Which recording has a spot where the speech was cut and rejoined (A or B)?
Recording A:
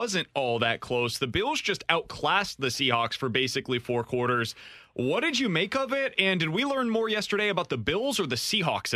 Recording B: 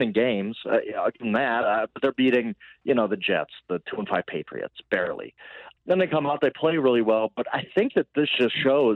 B